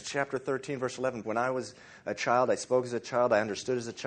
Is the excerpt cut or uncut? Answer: cut